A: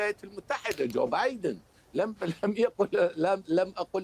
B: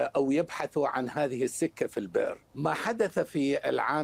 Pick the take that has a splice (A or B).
B